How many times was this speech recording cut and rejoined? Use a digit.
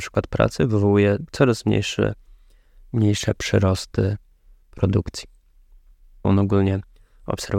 1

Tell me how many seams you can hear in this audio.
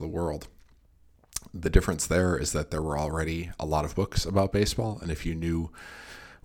0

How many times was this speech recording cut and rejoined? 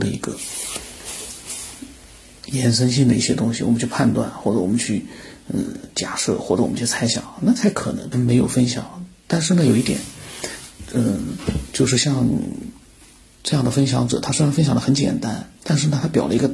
1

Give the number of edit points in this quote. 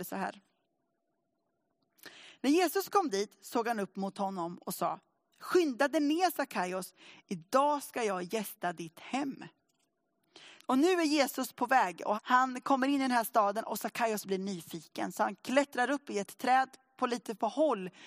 2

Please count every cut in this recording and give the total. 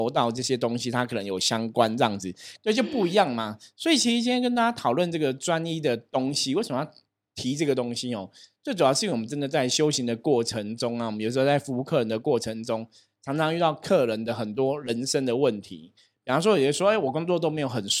1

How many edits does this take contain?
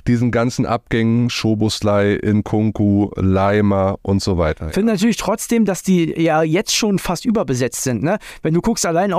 0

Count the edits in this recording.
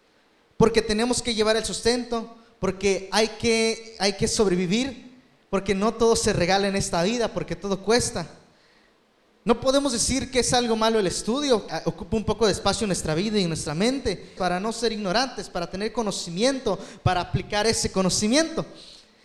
2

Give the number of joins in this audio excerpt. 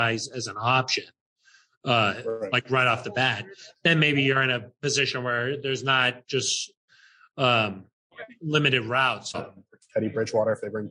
1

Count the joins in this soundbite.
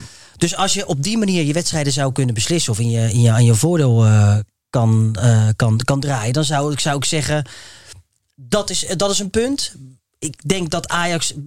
0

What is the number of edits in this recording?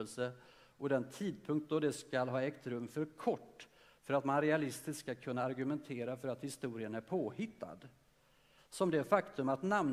1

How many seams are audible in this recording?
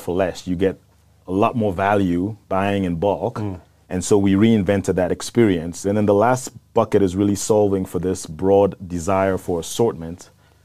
2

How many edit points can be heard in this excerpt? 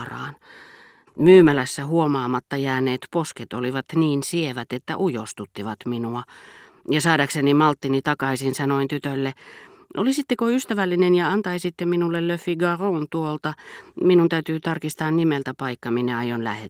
1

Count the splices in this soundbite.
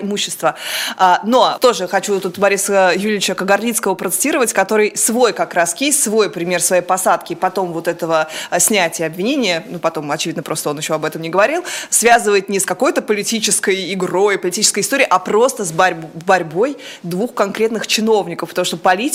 2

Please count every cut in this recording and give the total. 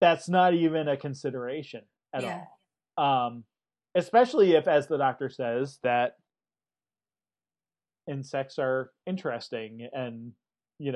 0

